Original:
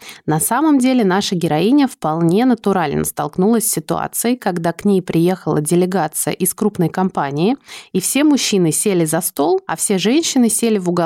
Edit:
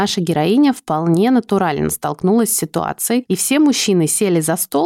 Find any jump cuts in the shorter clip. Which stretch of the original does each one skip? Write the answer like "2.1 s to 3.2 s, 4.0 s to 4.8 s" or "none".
4.4 s to 7.9 s